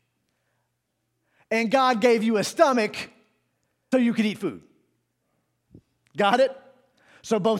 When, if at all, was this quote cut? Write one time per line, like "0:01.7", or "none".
0:03.9